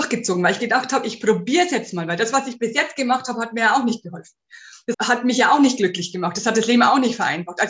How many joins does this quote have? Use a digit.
1